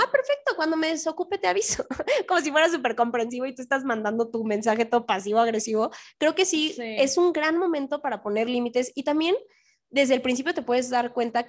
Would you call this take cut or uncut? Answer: uncut